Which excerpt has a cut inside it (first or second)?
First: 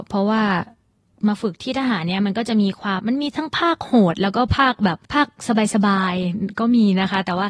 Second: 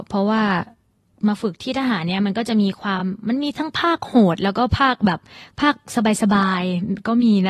first